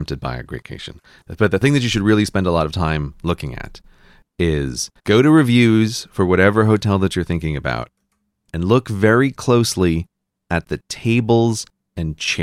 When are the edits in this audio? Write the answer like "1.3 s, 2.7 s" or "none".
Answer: 5.0 s